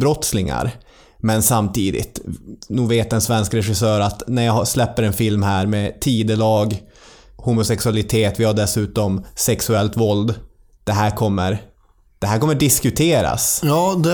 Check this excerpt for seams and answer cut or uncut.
uncut